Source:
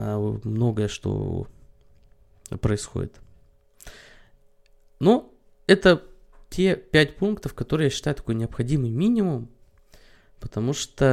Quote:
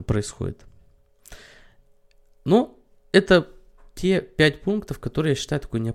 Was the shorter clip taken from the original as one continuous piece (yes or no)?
yes